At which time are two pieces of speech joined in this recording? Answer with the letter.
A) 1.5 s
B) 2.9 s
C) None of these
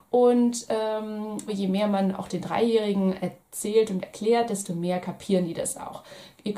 A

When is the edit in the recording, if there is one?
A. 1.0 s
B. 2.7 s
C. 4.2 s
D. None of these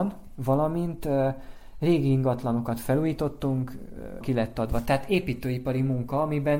C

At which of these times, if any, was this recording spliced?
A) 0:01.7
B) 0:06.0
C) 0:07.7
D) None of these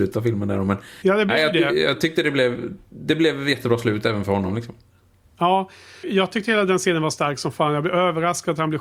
B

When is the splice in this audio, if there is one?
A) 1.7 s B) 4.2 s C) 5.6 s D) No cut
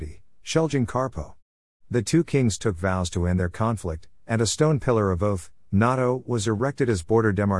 A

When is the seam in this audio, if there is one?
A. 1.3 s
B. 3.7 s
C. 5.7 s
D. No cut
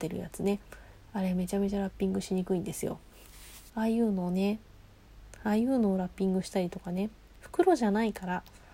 B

